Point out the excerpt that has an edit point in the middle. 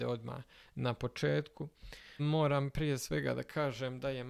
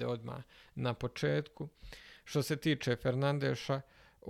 first; 1 cut; at 2.2 s

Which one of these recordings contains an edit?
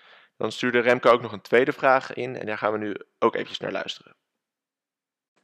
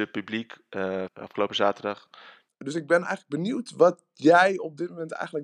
second; 2 cuts; at 1.1 s, 2.5 s

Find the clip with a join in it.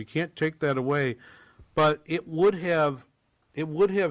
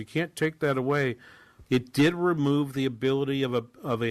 second; 1 cut; at 1.7 s

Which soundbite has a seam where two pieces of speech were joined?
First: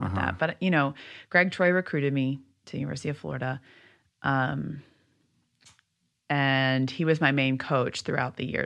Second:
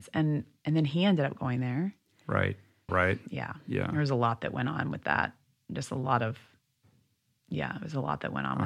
second; 1 cut; at 2.9 s

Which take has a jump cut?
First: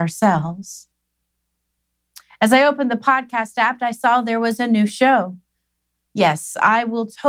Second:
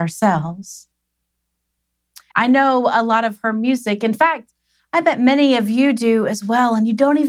second; 1 cut; at 2.3 s

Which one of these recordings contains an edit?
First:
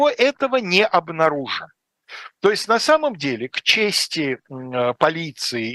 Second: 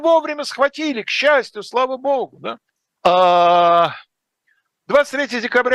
second; 1 cut; at 3.0 s

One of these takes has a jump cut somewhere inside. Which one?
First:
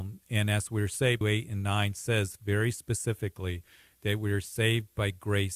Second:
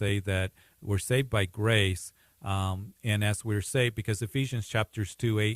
first; 1 cut; at 1.2 s

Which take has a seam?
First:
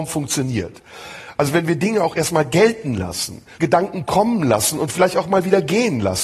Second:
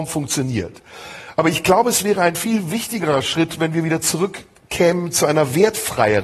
first; 2 cuts; at 1.3 s, 3.5 s

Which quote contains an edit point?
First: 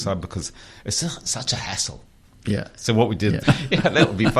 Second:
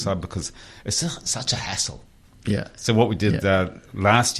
first; 1 cut; at 3.4 s

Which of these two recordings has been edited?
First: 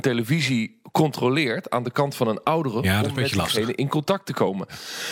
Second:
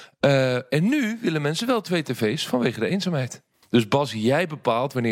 second; 1 cut; at 3.6 s

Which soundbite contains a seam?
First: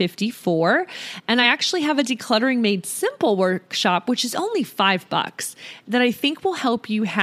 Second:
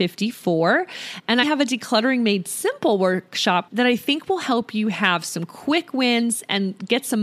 second; 2 cuts; at 1.4 s, 3.7 s

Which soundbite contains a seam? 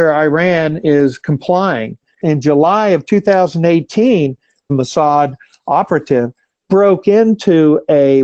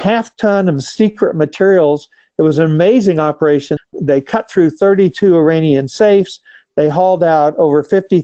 second; 1 cut; at 3.8 s

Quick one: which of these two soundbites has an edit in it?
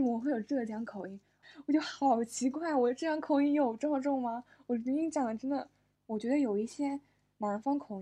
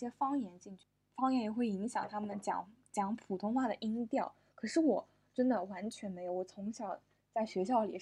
first; 1 cut; at 1.4 s

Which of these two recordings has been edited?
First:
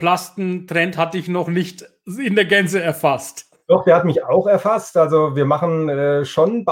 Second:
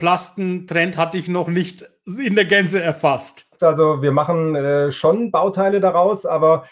second; 1 cut; at 3.6 s

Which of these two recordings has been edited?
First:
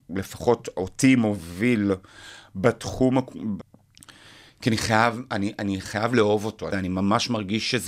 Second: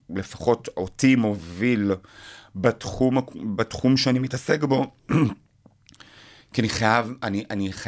first; 2 cuts; at 3.6 s, 6.7 s

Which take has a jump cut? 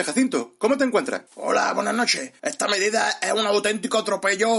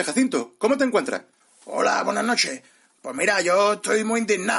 first; 2 cuts; at 1.3 s, 2.4 s

